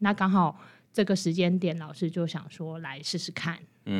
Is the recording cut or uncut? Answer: uncut